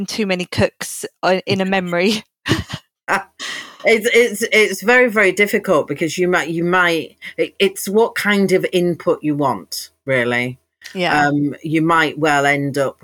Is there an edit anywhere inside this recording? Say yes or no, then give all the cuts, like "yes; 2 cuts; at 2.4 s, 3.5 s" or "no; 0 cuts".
no; 0 cuts